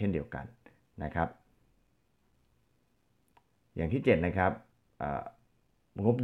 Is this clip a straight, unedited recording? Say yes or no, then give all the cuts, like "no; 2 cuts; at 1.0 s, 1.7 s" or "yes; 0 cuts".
yes; 0 cuts